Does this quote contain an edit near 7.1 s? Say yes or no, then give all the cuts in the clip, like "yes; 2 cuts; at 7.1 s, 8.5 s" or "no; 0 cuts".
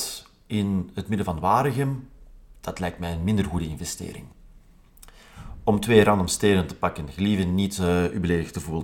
no; 0 cuts